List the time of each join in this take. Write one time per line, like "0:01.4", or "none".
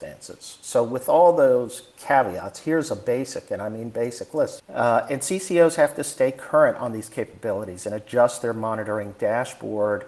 0:04.6